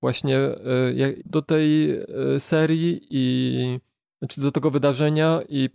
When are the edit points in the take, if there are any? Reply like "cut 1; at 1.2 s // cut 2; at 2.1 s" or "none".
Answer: cut 1; at 1.2 s